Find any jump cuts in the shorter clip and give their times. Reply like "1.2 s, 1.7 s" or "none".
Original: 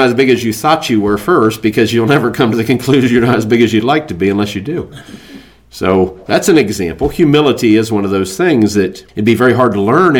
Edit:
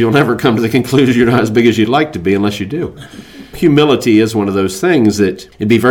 3.5 s